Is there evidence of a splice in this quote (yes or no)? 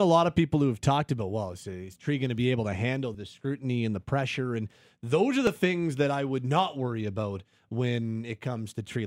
yes